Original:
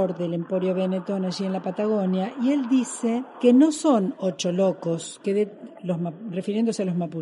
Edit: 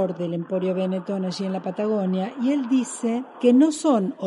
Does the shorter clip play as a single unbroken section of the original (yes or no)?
yes